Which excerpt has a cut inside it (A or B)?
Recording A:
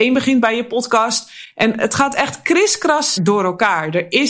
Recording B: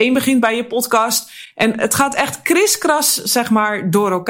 A